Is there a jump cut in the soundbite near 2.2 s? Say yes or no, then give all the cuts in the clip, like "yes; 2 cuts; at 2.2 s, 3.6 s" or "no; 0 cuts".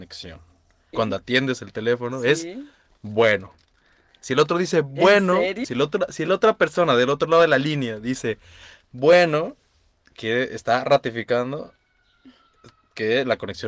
no; 2 cuts; at 0.9 s, 5.6 s